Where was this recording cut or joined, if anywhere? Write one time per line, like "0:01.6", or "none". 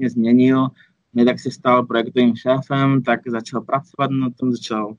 none